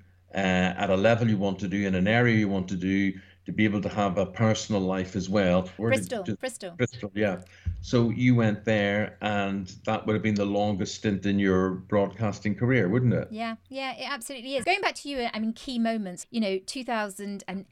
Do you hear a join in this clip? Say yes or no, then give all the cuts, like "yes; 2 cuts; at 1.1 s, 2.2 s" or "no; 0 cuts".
yes; 3 cuts; at 5.8 s, 14.6 s, 16.2 s